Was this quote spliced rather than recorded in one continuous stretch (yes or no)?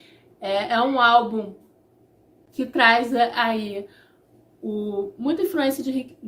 no